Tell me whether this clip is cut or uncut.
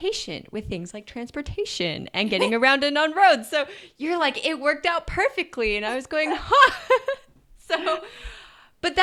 uncut